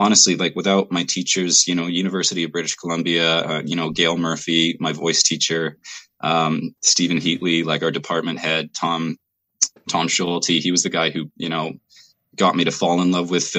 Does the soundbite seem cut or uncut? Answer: uncut